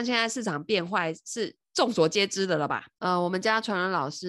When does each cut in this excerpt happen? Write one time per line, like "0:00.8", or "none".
0:02.9